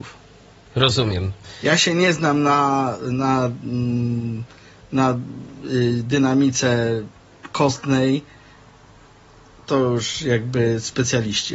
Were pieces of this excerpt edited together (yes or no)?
no